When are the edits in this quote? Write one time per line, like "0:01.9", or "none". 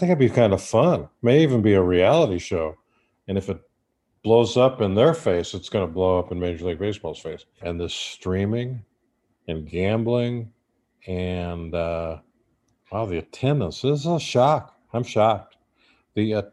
0:03.1
0:07.6